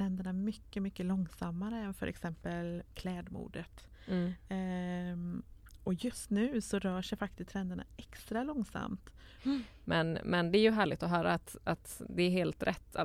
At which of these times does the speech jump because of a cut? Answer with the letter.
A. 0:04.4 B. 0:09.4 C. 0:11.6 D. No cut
B